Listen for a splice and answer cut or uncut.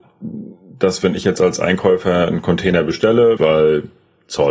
cut